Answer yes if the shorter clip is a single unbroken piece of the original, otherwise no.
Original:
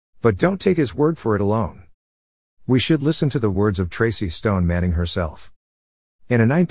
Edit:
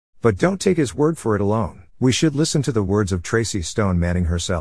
no